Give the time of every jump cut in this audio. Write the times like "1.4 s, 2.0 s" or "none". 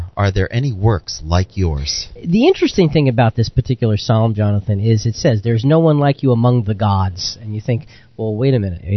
none